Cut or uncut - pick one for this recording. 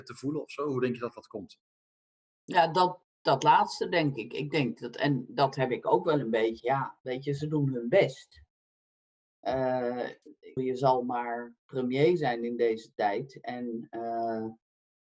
cut